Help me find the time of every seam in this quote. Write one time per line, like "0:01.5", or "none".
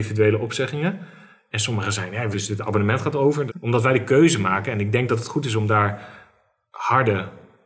0:02.3
0:03.5